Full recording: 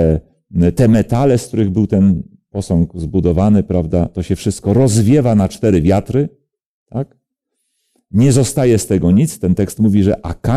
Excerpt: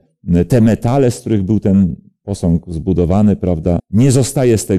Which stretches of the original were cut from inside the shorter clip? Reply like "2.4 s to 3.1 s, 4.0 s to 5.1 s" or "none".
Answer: 4.1 s to 8.0 s